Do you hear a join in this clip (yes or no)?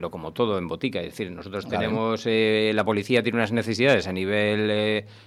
no